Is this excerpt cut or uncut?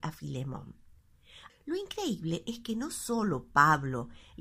cut